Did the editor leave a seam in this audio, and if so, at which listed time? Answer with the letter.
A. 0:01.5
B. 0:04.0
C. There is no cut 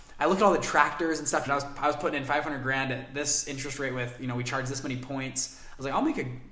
A